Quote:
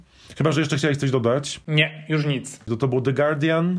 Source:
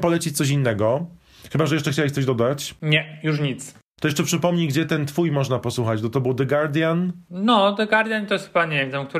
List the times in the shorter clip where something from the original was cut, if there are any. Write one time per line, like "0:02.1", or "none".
0:02.7